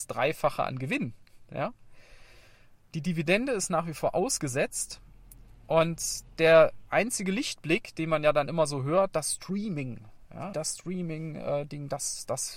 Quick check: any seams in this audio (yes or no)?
yes